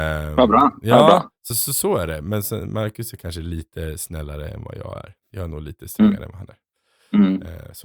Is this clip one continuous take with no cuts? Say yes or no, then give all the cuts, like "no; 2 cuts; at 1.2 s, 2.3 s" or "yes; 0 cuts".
yes; 0 cuts